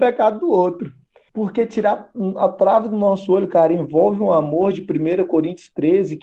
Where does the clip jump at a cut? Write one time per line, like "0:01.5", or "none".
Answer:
0:01.3

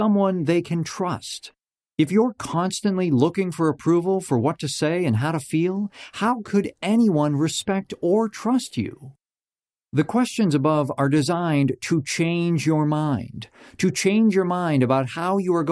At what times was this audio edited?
none

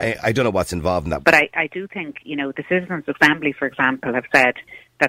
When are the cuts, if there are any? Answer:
0:01.2

